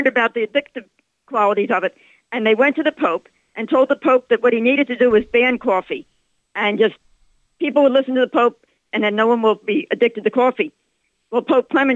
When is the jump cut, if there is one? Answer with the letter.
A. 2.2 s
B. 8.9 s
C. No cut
B